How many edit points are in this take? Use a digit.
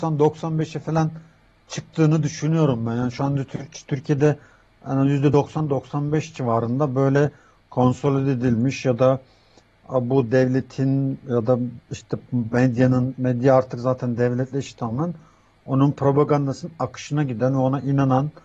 0